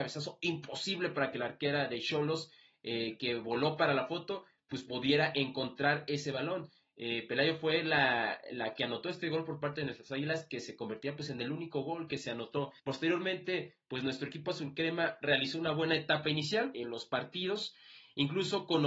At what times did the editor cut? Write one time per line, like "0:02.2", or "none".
0:12.8
0:16.7